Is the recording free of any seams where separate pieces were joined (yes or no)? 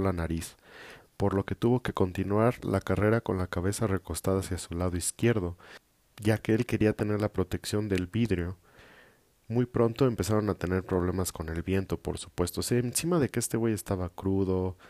yes